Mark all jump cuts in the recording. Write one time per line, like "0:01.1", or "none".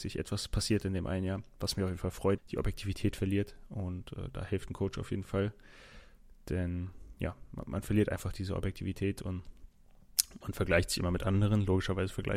0:02.4

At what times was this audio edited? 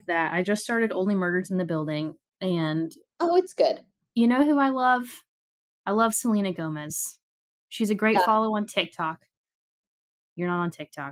none

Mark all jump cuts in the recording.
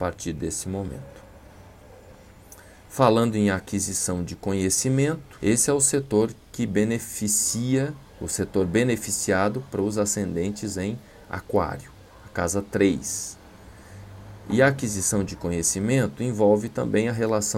0:05.4
0:08.1

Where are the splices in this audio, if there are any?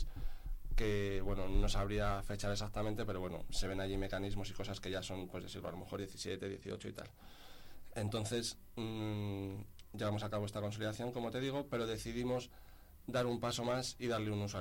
0:07.9

